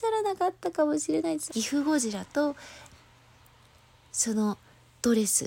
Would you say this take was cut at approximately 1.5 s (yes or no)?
yes